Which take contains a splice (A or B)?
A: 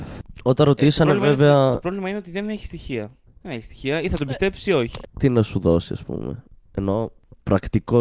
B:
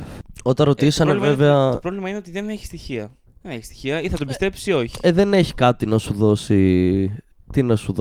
A